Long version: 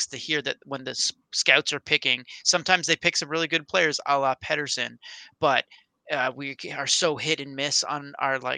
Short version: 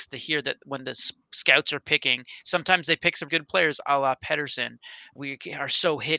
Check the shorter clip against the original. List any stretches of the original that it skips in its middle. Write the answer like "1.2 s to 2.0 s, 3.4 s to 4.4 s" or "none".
3.3 s to 3.5 s, 5.4 s to 6.3 s